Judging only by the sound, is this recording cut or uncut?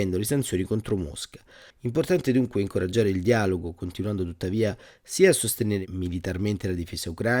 cut